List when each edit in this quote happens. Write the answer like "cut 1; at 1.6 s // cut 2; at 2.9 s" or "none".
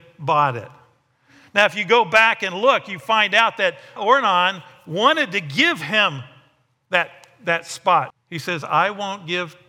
cut 1; at 4.0 s // cut 2; at 8.1 s